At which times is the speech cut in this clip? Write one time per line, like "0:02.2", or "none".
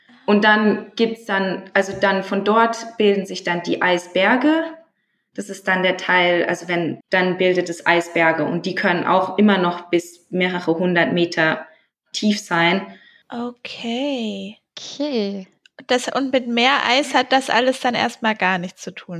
0:07.0
0:13.2